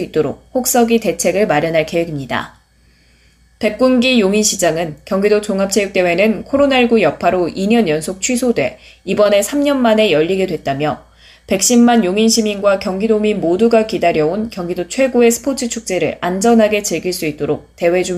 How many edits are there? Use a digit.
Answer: 0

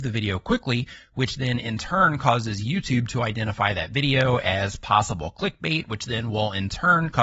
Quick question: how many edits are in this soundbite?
0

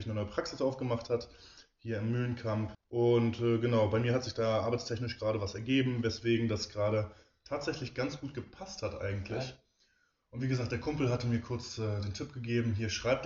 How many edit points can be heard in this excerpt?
1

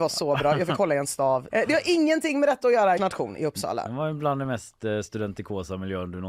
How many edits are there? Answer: 2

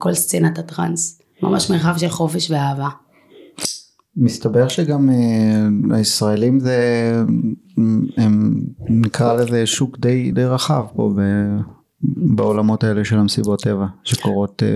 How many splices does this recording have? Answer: 1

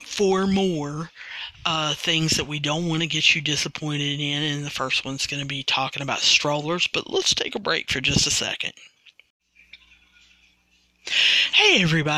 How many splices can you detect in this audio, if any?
0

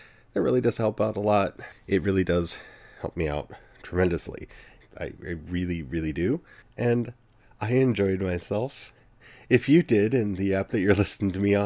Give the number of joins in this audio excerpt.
3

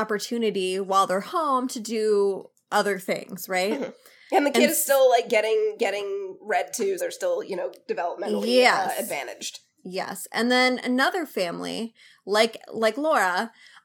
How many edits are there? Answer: 1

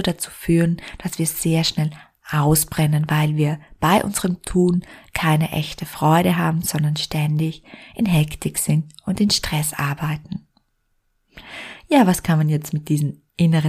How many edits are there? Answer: 0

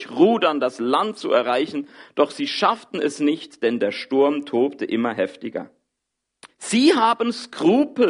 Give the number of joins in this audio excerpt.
1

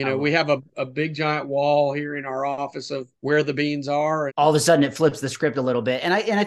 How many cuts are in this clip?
2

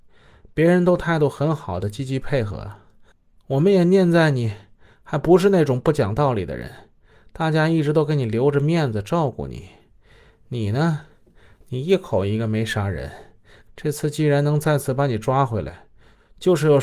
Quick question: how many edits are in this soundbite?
1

